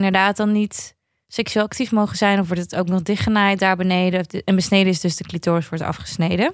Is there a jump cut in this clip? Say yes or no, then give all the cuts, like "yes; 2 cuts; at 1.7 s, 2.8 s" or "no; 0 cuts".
no; 0 cuts